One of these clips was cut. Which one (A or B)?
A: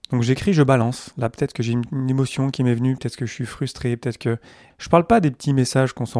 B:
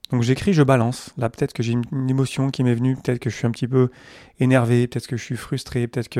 A